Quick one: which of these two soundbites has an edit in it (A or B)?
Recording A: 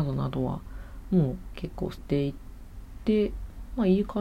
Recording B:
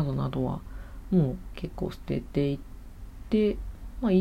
A